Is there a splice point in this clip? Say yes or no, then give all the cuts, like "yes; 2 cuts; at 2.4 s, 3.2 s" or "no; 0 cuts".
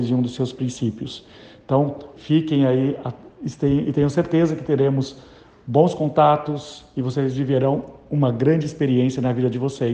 yes; 1 cut; at 2.2 s